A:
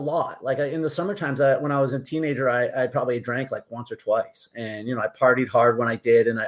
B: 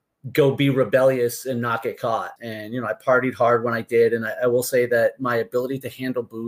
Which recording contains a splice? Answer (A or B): B